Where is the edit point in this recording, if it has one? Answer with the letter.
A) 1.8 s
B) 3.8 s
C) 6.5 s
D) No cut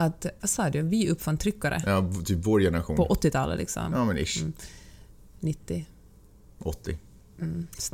D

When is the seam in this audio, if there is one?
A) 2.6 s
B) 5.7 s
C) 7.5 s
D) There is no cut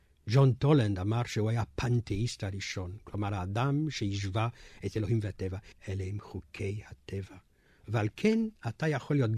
B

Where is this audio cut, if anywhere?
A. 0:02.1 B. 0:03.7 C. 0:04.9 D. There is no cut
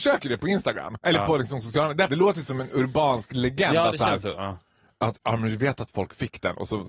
A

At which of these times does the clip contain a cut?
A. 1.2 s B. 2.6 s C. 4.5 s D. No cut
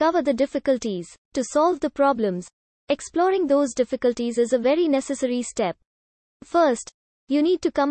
A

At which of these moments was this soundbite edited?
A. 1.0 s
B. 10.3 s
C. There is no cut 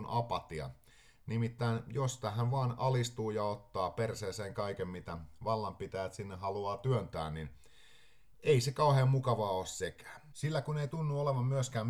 B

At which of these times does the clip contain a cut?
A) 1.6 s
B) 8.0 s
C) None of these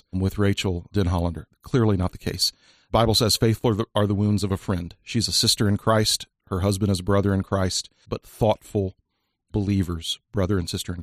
B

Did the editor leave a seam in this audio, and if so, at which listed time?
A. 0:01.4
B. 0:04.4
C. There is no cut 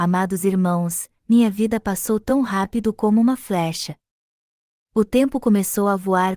C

